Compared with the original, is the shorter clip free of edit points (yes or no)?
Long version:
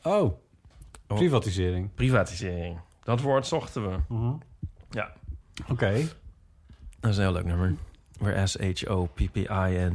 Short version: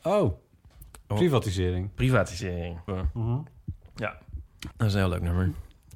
no